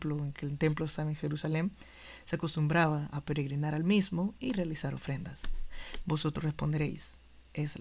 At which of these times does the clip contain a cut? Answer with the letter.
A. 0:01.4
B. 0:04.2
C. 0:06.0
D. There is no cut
C